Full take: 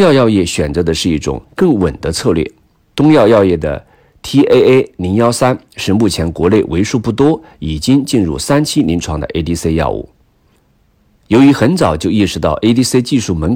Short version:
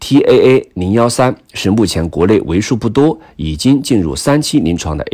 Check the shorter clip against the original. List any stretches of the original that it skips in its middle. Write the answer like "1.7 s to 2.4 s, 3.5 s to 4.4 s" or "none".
none